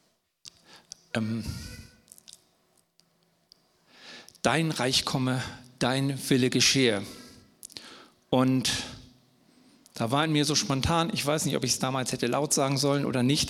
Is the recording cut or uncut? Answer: uncut